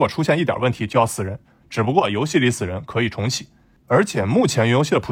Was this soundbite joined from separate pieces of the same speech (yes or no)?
no